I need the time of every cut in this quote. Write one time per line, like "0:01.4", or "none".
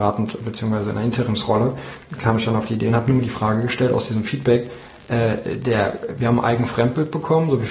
none